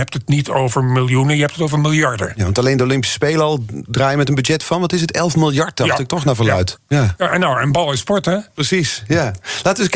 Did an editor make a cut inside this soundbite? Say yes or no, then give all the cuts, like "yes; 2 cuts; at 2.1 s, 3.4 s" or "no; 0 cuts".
yes; 1 cut; at 6.8 s